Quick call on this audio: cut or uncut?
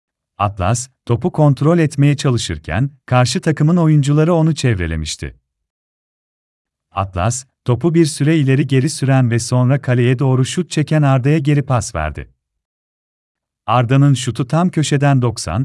uncut